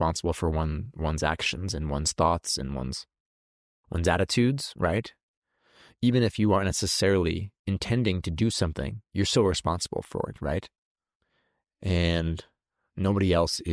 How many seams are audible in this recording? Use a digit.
0